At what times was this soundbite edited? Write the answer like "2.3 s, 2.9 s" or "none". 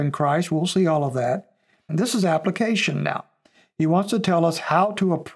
1.9 s